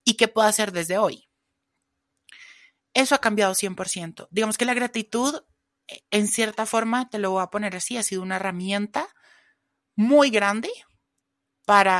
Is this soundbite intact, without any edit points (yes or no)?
yes